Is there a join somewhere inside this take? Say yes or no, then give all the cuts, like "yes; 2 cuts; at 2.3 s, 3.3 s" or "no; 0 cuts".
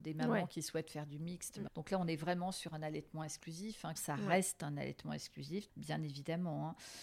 yes; 3 cuts; at 1.7 s, 4.0 s, 5.7 s